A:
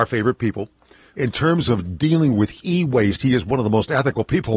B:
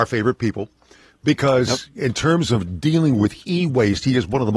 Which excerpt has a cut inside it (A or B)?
A